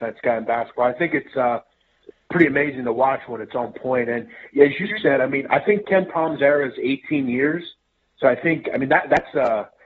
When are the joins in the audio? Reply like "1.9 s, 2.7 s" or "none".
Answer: none